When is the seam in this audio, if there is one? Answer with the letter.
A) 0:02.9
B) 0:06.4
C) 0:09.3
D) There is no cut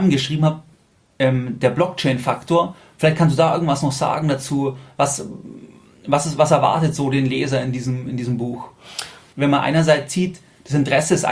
C